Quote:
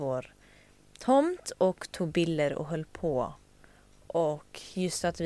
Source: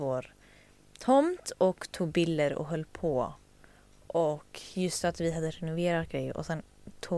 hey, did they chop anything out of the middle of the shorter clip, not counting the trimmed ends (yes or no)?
no